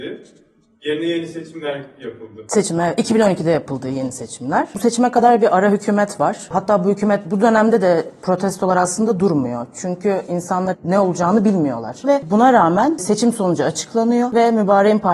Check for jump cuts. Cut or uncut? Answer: cut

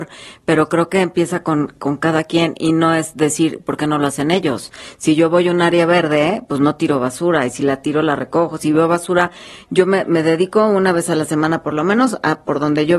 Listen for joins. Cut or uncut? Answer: uncut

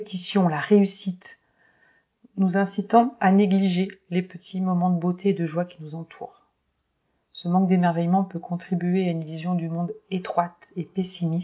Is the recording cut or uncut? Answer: uncut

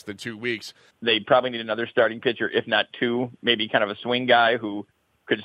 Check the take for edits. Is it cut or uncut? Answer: cut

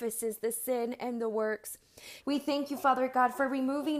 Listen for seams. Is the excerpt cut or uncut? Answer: cut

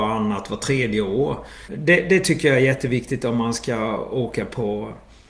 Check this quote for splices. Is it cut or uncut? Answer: cut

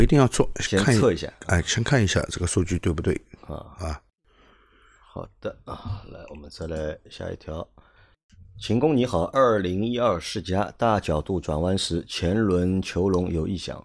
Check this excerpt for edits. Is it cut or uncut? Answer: uncut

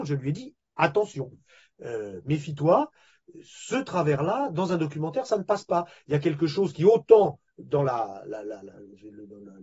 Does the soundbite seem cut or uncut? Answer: uncut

